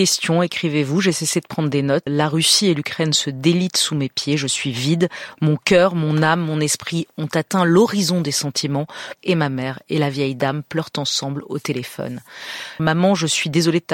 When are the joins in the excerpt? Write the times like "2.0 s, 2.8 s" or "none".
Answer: 2.1 s, 9.2 s, 12.8 s